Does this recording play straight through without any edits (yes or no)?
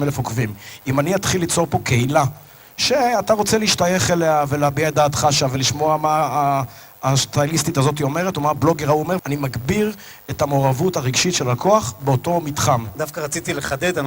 no